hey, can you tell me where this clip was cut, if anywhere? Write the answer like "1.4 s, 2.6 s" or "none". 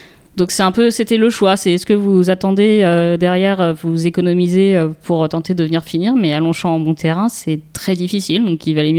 none